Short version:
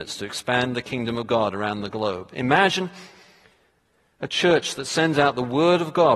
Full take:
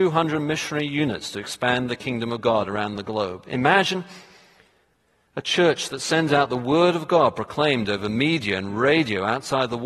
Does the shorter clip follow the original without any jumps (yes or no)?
yes